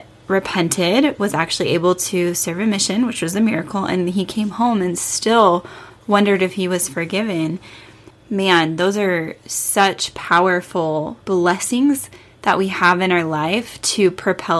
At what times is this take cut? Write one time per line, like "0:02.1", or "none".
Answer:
0:08.1
0:11.2